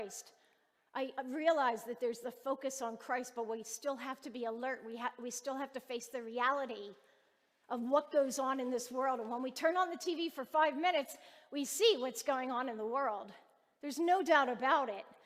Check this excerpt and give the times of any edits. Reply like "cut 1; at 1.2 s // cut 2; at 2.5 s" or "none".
none